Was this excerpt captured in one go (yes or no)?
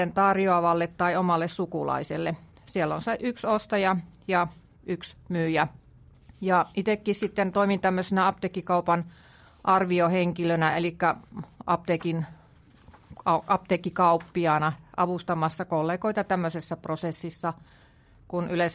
yes